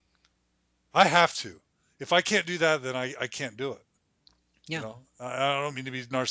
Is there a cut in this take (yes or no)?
no